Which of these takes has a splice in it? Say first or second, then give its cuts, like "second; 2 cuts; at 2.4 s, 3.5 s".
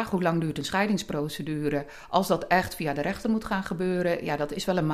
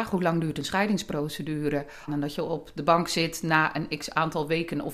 second; 1 cut; at 2.1 s